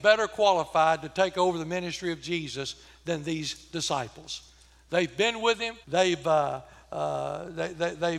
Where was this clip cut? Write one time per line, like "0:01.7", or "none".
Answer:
0:05.8